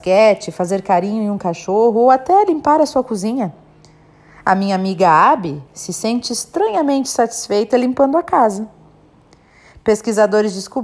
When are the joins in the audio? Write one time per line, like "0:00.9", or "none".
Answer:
none